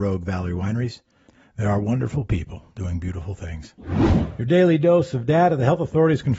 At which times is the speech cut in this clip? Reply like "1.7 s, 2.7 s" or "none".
none